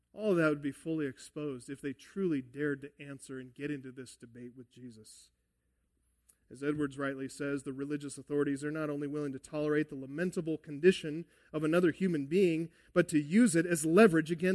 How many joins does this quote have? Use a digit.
0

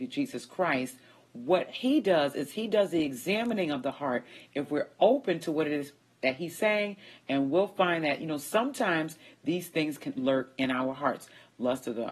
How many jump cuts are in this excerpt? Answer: 1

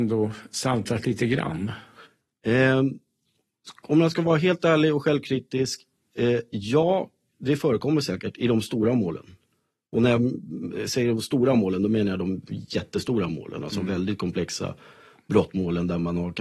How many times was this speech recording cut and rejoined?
0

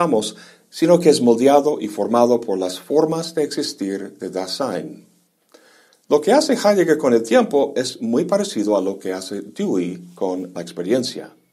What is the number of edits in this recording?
0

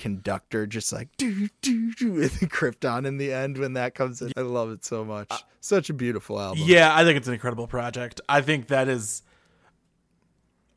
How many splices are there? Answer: 1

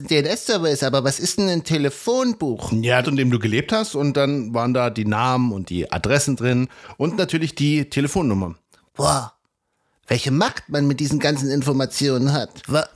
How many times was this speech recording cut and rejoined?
1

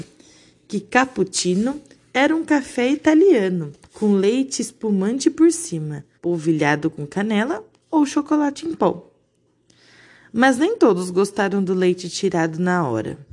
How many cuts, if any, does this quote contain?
2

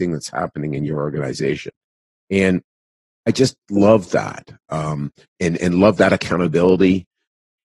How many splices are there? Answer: 1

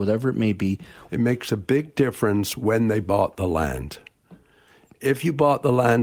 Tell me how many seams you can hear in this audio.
1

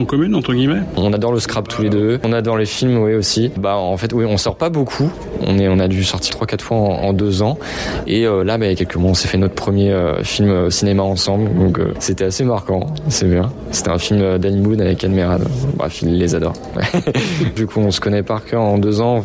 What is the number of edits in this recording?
1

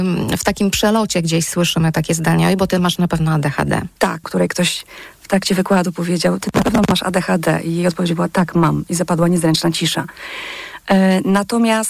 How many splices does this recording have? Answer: 1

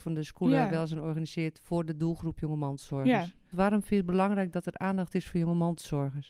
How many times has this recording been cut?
1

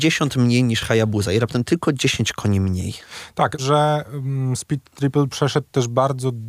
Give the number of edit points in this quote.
1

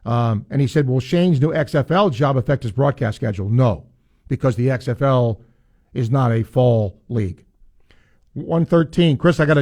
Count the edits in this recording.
0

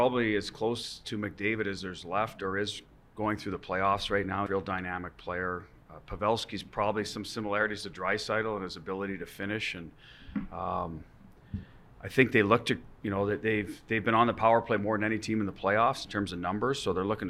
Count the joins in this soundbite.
1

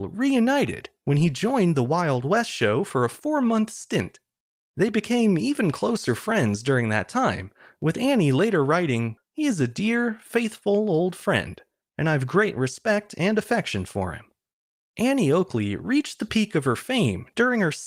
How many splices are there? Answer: 1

